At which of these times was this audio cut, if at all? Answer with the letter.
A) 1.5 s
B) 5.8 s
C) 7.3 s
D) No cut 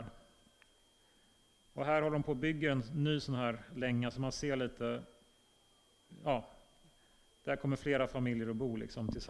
D